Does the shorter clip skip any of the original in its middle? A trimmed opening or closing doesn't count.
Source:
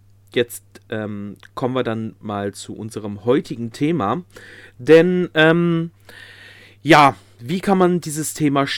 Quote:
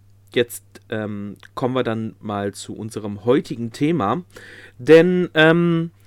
no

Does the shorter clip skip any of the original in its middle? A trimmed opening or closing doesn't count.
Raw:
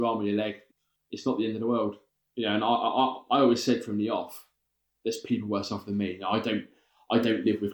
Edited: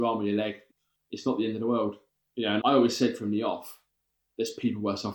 yes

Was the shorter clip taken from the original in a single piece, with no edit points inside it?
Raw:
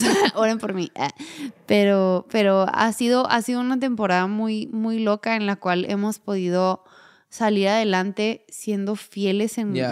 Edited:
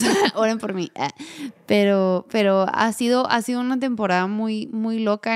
yes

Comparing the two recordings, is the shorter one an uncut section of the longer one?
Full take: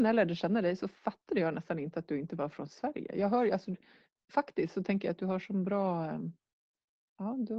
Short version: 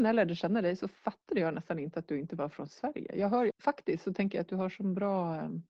no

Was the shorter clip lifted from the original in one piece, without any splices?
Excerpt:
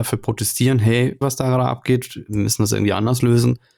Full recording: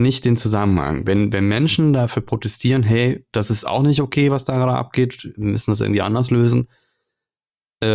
no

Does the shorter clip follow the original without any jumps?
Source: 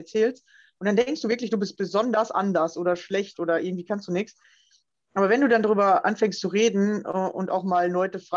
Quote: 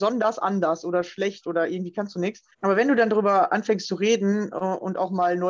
no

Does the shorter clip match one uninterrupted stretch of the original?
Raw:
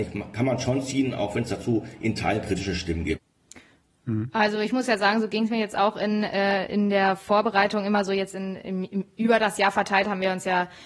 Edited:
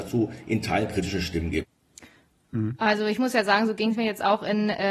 yes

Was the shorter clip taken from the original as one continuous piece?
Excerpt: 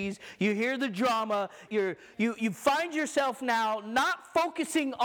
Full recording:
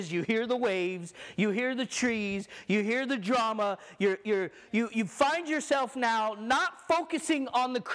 no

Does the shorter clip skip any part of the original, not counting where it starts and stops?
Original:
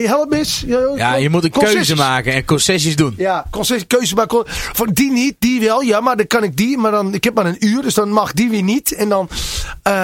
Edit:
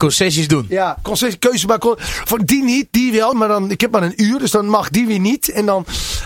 yes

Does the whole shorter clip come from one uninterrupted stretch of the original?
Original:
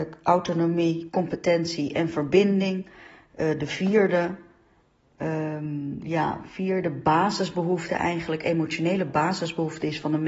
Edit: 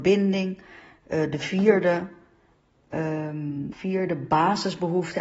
no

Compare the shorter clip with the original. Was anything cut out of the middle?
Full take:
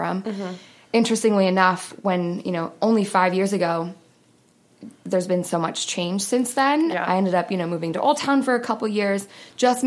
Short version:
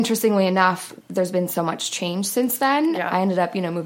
yes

